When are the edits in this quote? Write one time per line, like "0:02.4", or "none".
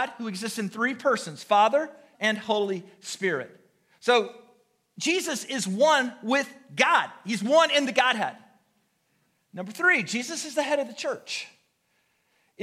0:02.1